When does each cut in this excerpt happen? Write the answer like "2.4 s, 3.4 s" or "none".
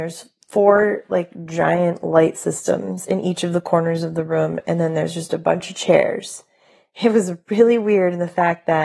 none

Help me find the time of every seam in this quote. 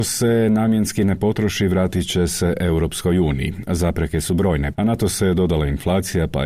4.7 s

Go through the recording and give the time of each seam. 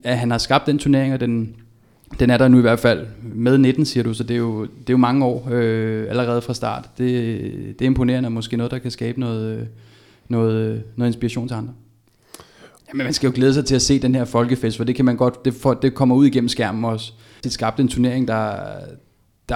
12.8 s, 17.4 s

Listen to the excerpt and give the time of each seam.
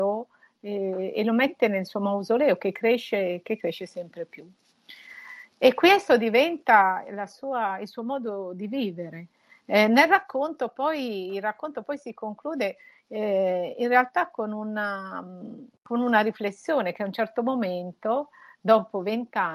none

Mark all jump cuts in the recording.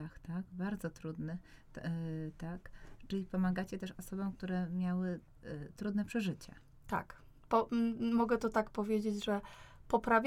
none

